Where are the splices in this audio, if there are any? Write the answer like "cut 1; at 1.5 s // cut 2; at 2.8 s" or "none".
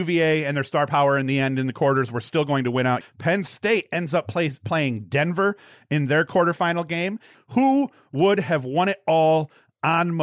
cut 1; at 3.0 s // cut 2; at 7.3 s